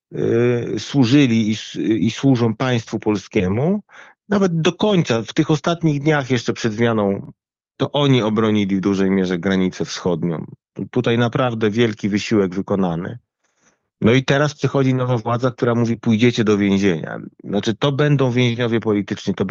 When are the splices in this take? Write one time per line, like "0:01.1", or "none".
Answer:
none

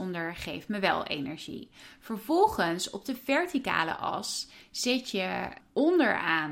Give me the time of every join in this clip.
none

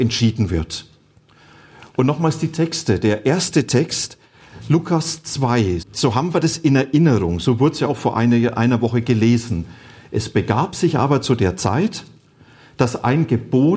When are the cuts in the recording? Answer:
0:05.8

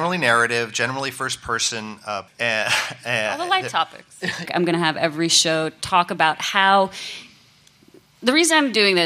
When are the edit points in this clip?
0:02.3
0:04.5

